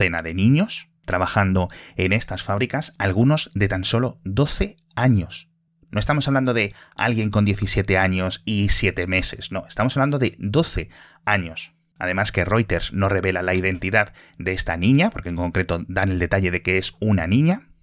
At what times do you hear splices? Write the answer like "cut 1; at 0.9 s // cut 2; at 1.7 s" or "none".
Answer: none